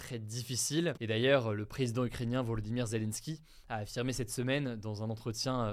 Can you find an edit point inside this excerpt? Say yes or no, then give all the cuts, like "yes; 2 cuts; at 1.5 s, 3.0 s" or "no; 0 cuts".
yes; 1 cut; at 0.9 s